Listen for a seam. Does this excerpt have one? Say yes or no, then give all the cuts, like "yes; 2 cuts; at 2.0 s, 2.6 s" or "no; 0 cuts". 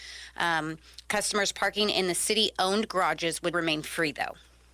yes; 1 cut; at 3.5 s